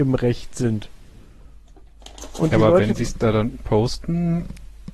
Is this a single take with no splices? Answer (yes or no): yes